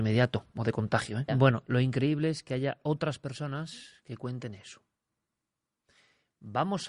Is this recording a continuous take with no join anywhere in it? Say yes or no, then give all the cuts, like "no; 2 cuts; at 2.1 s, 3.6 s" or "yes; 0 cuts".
no; 1 cut; at 1.3 s